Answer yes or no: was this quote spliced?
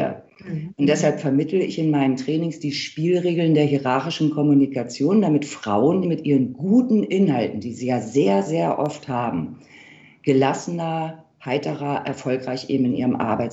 yes